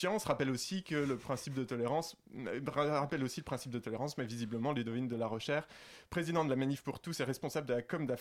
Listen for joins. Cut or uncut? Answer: uncut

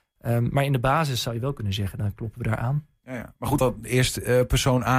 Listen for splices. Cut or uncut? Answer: cut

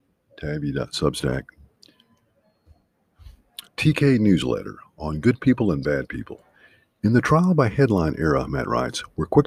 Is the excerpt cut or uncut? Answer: cut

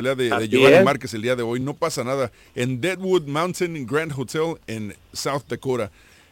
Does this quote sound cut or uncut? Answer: uncut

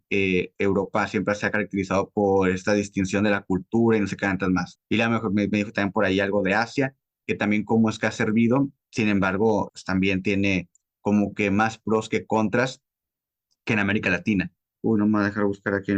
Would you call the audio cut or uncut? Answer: cut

